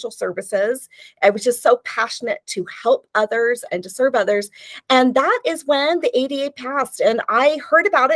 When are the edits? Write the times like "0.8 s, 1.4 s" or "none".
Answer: none